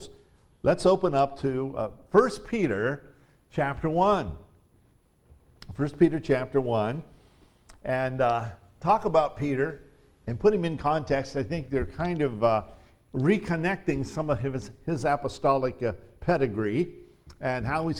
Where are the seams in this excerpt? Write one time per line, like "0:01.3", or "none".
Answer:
none